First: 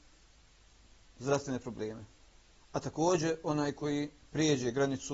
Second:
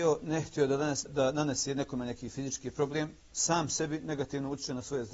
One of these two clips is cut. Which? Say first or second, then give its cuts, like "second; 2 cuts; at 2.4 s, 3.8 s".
second; 1 cut; at 1.1 s